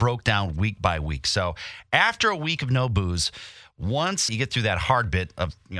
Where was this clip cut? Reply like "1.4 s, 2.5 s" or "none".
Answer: 4.3 s